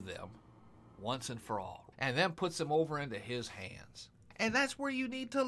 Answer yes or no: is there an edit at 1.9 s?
yes